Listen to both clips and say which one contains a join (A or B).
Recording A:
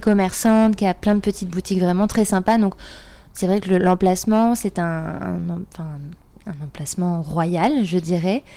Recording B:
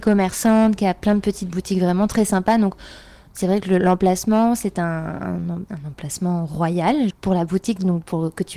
B